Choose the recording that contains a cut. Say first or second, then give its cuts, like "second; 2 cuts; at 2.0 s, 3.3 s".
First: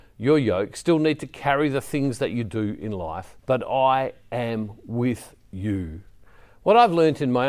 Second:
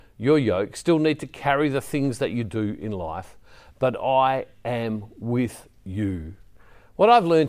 first; 1 cut; at 3.4 s